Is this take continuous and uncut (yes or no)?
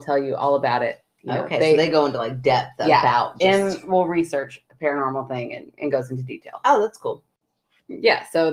yes